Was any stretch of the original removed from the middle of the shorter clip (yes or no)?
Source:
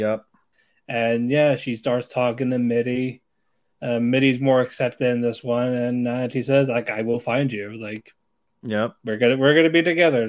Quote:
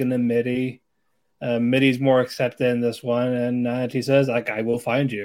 no